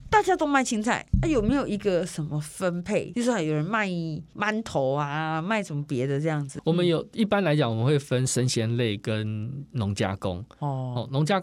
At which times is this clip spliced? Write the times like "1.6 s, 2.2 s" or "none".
none